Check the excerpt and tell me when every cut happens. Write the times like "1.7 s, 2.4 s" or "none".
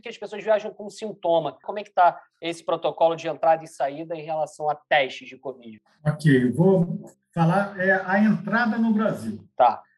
1.6 s